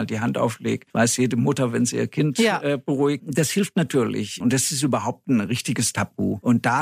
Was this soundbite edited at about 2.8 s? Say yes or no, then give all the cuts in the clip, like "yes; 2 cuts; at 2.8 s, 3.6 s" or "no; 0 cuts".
no; 1 cut; at 4.4 s